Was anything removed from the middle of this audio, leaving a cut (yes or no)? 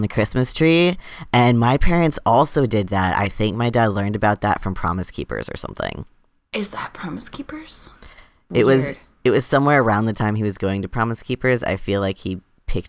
no